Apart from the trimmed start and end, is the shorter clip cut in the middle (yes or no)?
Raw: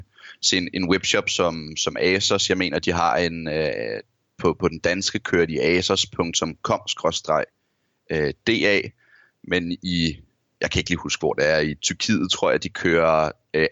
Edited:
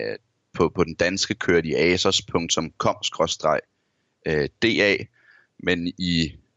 no